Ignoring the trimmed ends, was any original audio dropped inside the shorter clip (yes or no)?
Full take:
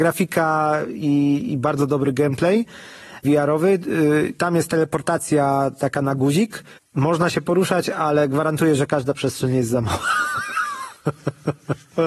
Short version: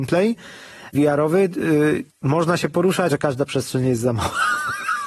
yes